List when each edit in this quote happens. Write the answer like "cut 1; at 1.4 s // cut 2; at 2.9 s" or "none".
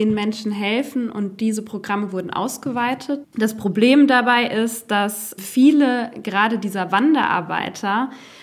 cut 1; at 3.2 s